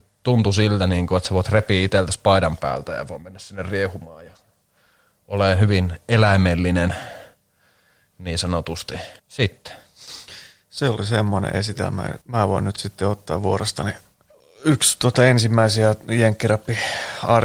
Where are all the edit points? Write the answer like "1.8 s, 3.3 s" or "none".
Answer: 9.2 s, 12.2 s